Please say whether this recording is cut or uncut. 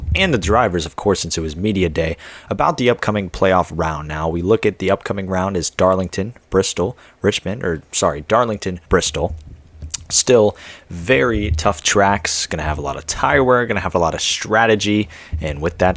cut